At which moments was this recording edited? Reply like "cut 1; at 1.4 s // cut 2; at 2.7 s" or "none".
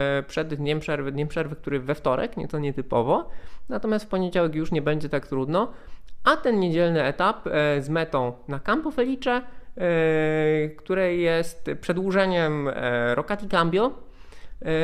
none